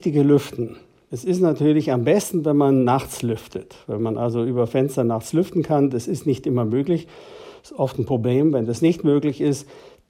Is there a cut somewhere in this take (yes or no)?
no